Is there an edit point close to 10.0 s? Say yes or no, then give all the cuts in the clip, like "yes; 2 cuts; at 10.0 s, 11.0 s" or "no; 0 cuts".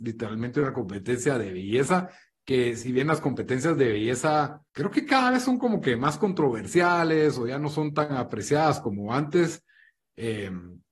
no; 1 cut; at 4.7 s